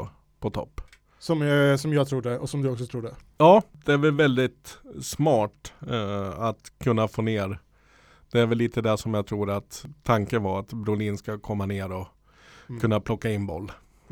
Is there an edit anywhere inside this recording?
no; 0 cuts

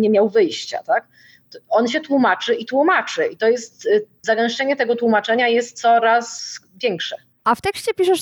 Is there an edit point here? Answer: no; 0 cuts

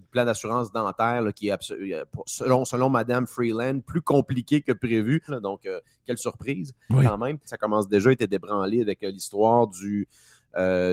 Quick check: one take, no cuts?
no; 2 cuts; at 5.3 s, 7.5 s

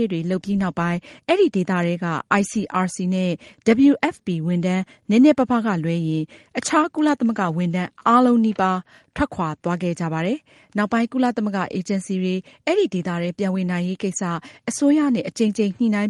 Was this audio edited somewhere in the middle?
no; 0 cuts

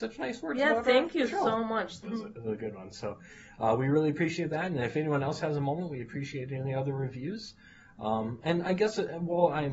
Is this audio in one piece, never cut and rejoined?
no; 1 cut; at 2.0 s

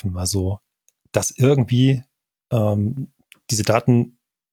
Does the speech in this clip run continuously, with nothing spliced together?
yes; 0 cuts

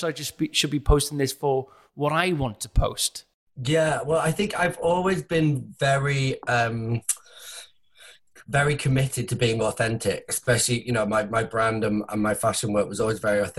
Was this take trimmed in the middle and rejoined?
no; 0 cuts

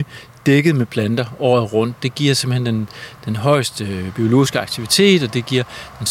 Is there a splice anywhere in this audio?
no; 0 cuts

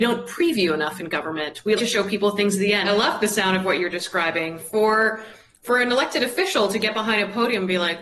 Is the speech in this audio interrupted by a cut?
yes; 2 cuts; at 1.8 s, 2.8 s

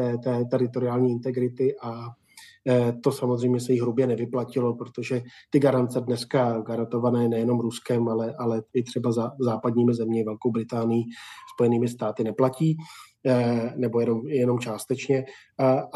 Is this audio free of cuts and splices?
yes; 0 cuts

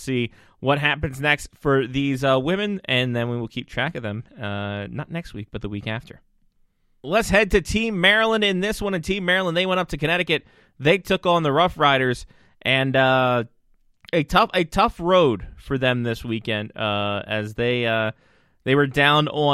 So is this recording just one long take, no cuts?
yes; 0 cuts

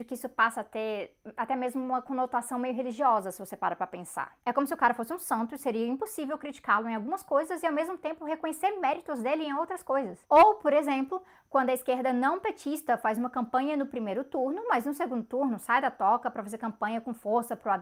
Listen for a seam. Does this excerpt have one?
no; 0 cuts

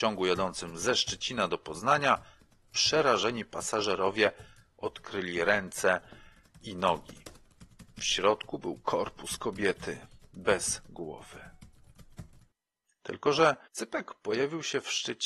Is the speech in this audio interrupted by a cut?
yes; 2 cuts; at 7.9 s, 13.6 s

